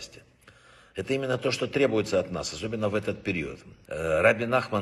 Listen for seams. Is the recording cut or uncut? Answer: cut